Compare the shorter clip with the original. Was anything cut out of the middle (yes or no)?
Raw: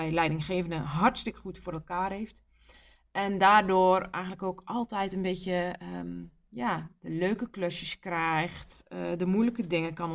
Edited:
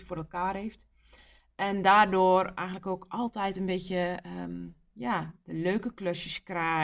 no